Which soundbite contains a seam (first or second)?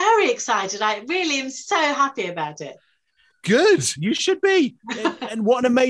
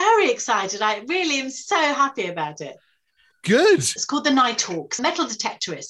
second